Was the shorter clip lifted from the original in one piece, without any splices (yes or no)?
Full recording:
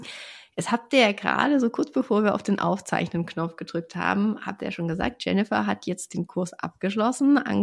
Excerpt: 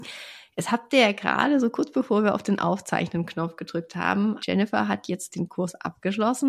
no